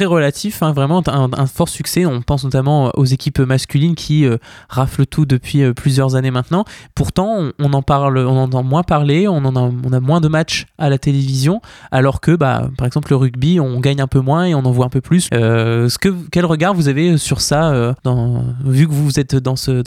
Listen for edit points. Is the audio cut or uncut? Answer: cut